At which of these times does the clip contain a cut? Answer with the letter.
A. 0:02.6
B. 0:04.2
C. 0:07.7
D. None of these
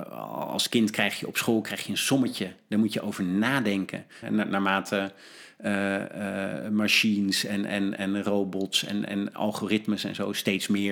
B